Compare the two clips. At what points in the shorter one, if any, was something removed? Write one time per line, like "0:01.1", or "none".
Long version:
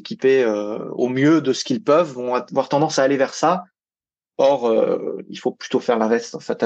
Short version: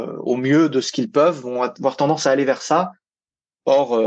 none